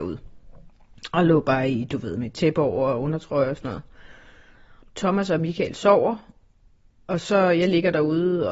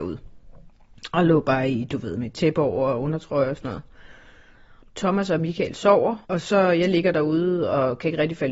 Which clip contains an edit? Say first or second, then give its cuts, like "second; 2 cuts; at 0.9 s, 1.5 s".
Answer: second; 1 cut; at 6.2 s